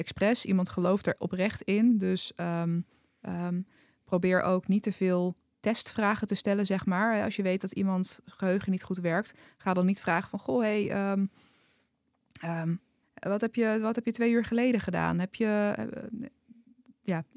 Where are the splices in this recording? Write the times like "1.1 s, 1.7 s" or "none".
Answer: 13.0 s